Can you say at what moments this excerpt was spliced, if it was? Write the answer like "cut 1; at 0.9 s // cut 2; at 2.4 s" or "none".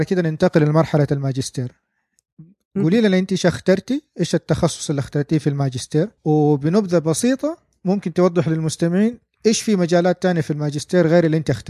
cut 1; at 6.2 s